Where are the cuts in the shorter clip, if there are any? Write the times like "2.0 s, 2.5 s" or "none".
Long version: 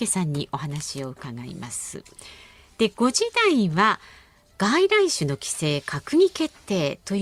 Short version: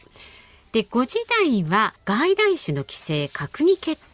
2.0 s